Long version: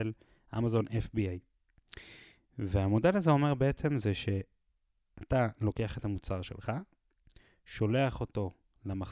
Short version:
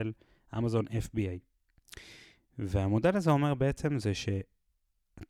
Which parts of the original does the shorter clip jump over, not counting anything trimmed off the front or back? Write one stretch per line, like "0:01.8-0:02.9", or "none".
none